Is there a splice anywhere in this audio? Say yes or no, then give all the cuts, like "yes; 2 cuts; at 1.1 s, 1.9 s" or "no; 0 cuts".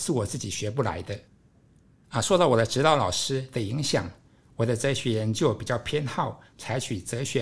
no; 0 cuts